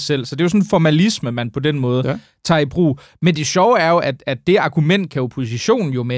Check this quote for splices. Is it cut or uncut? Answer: uncut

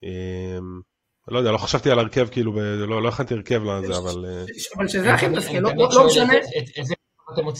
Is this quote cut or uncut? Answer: uncut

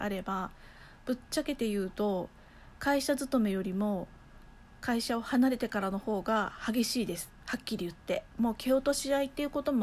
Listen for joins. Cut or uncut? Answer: uncut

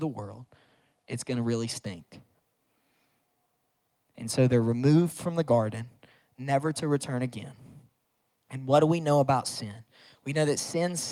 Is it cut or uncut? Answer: uncut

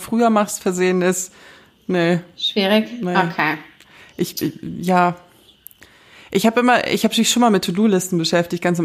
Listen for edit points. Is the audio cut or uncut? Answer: uncut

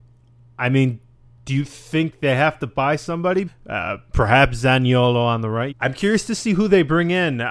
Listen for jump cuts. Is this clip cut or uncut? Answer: cut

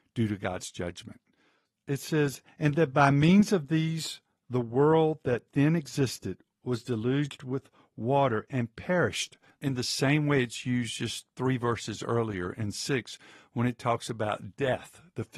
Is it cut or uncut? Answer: cut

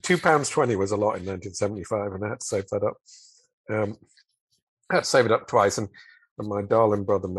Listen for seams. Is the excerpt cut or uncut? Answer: uncut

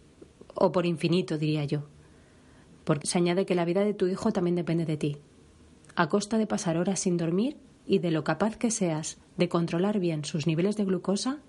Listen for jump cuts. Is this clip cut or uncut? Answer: cut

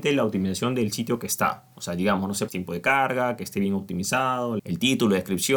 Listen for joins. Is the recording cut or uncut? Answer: cut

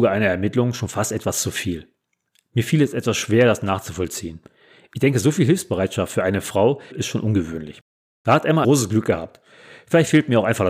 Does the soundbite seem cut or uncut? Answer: cut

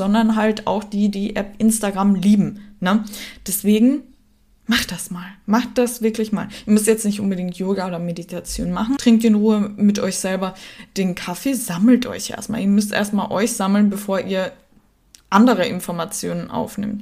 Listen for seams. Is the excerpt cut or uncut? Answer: cut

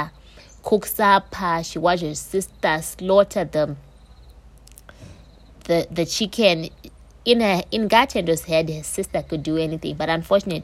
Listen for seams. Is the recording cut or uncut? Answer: uncut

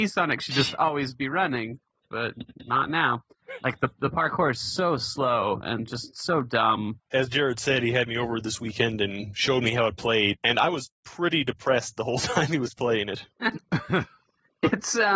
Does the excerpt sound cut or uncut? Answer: cut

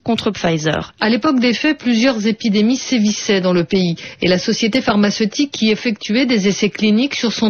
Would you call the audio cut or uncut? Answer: cut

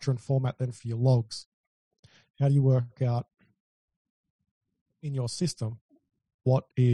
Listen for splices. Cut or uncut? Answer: uncut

